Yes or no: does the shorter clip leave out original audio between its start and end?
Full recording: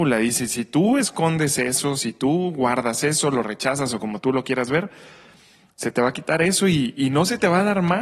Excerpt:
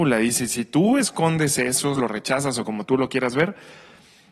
yes